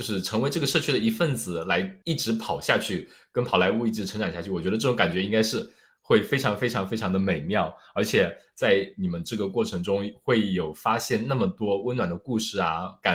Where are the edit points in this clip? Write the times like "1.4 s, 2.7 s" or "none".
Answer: none